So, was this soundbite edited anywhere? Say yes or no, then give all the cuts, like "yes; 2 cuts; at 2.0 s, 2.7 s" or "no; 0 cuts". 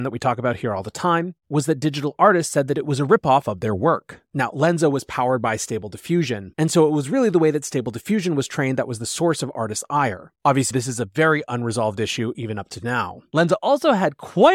yes; 1 cut; at 10.7 s